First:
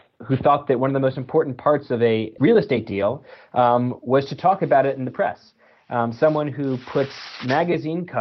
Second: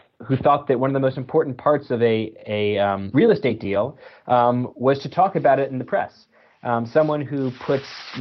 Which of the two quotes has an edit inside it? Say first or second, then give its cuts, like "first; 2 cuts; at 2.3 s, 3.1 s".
first; 1 cut; at 2.4 s